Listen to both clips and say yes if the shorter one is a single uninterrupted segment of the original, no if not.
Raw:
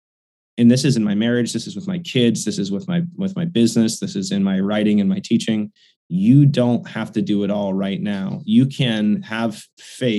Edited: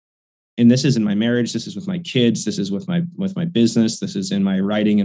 yes